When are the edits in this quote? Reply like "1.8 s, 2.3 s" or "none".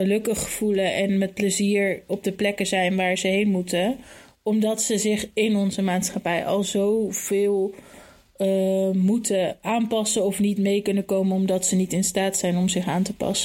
none

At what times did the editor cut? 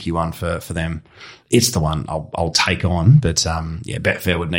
none

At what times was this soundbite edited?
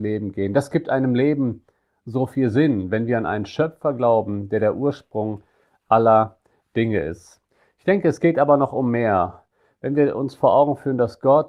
none

